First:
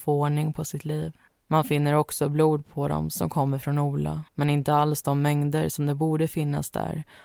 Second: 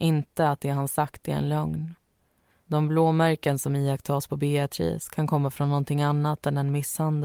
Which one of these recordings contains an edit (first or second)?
first